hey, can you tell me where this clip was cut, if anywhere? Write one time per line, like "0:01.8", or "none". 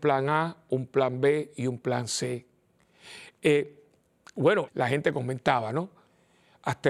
0:03.4
0:04.7